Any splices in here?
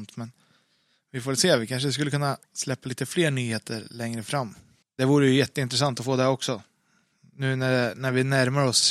yes; 1 cut; at 4.8 s

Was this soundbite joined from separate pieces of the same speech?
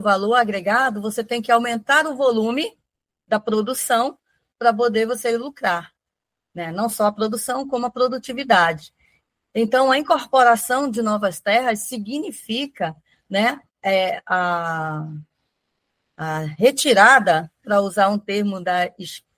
yes; 1 cut; at 17.6 s

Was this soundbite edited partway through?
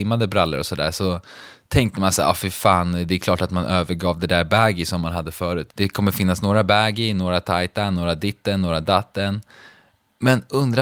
yes; 1 cut; at 5.7 s

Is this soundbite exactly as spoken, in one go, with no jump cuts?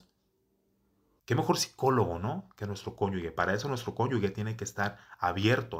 no; 1 cut; at 1.2 s

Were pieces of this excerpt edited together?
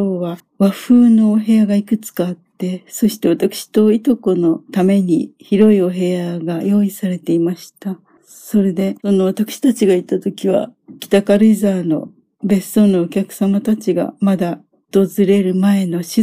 no; 0 cuts

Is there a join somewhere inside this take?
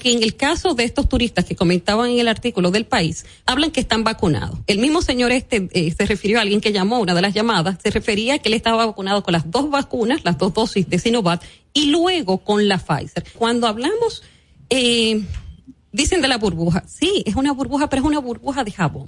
yes; 2 cuts; at 3.5 s, 13.3 s

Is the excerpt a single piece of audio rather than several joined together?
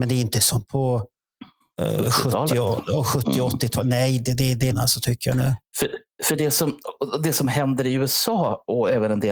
no; 1 cut; at 4.7 s

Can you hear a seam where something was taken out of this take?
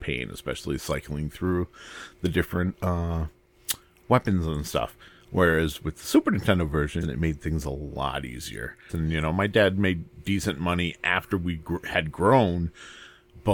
yes; 2 cuts; at 7.0 s, 8.9 s

